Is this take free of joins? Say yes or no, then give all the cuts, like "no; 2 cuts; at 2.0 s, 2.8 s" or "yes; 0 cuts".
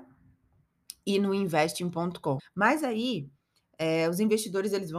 no; 1 cut; at 2.4 s